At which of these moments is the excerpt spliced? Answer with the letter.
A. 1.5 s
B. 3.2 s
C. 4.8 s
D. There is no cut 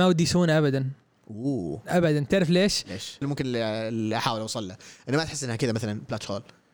B